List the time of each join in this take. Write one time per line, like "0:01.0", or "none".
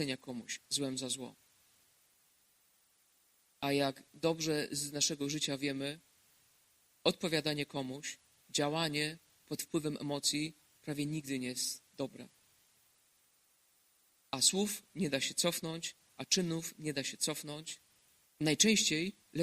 0:18.3